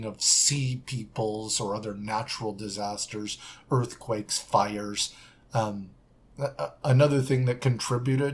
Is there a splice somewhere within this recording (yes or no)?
no